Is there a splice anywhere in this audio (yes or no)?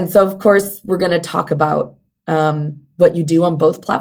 no